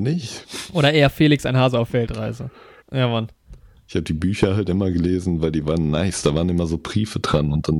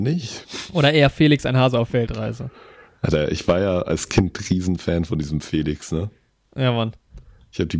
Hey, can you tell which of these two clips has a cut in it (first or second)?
first